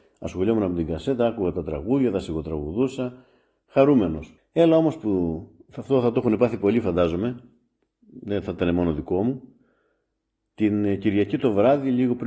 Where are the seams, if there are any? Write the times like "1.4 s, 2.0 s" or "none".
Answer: 4.4 s